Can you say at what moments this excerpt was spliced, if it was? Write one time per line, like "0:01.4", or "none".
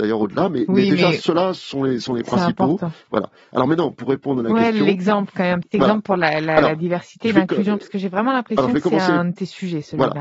none